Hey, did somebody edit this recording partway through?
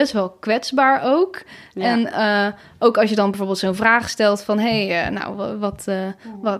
no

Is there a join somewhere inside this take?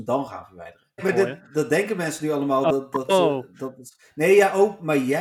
yes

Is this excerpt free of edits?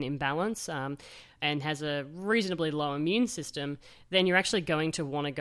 yes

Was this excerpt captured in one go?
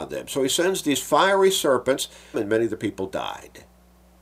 no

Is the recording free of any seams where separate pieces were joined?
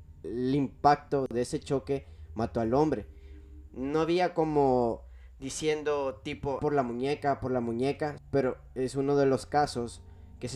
no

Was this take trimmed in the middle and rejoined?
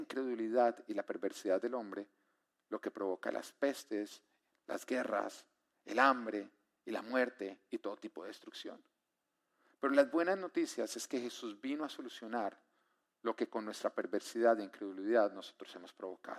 no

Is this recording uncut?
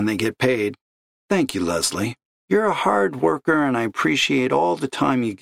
yes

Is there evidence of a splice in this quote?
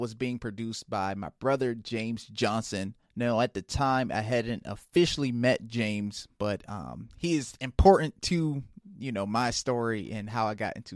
yes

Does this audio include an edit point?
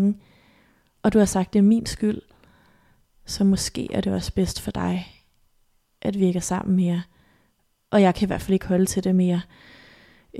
no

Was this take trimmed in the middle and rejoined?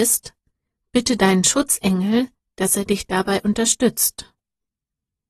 no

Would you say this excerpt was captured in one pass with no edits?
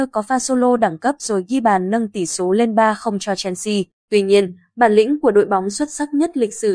no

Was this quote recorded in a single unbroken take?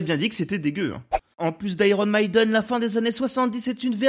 yes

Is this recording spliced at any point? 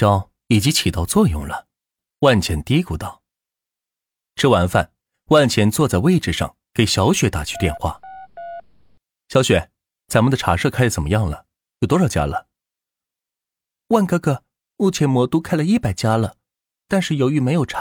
no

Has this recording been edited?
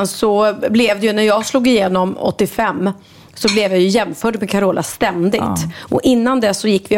no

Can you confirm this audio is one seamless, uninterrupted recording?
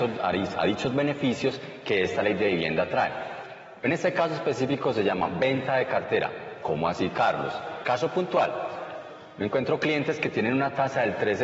no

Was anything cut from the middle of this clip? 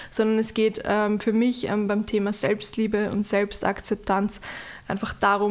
no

